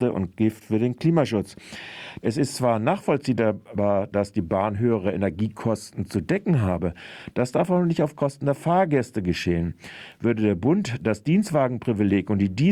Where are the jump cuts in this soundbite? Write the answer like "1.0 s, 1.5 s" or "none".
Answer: 2.2 s